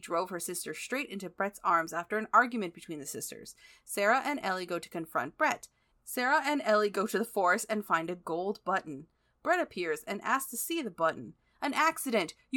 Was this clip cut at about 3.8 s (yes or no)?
no